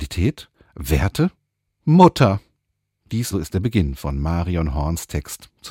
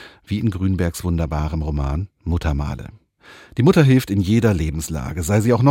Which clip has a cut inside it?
first; 1 cut; at 3.3 s

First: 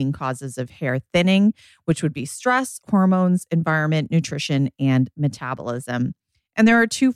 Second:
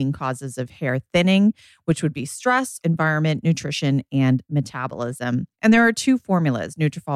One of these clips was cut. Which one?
second; 2 cuts; at 2.8 s, 5.5 s

